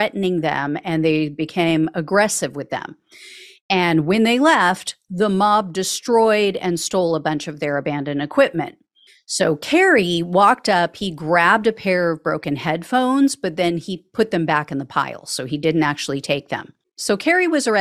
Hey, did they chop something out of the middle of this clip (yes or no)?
no